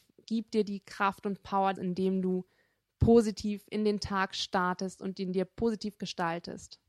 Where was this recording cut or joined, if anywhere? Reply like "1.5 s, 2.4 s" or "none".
1.8 s